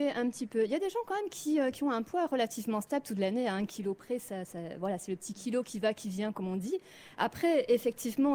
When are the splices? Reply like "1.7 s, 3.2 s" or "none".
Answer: none